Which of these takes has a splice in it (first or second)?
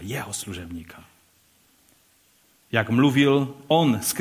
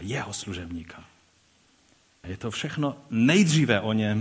second